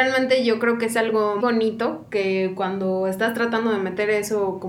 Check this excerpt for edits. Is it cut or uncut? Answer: cut